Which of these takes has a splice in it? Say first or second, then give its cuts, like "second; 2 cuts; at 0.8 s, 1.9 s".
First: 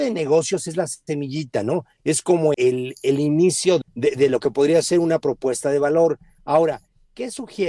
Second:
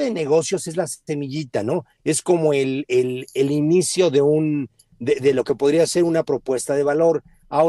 first; 2 cuts; at 2.5 s, 3.8 s